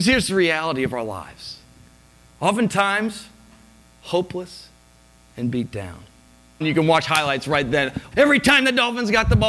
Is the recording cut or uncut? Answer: cut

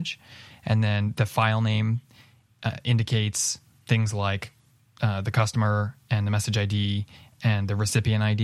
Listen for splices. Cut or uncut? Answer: uncut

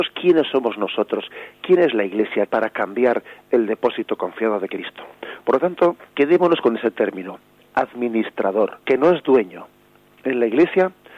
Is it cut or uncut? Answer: cut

